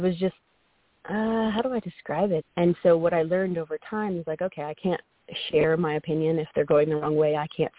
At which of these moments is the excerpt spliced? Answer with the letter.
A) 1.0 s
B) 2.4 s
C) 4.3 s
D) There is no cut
B